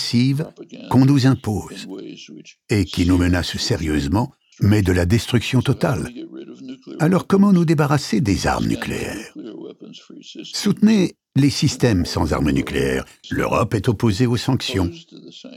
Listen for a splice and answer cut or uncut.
cut